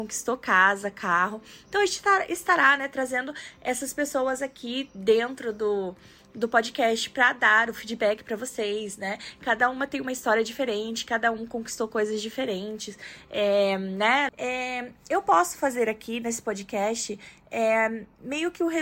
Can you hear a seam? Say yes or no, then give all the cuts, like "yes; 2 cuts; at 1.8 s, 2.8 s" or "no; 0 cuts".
yes; 1 cut; at 14.3 s